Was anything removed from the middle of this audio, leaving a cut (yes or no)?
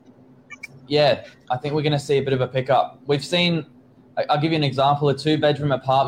no